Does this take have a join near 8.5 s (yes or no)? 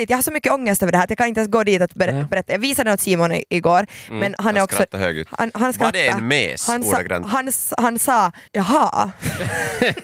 yes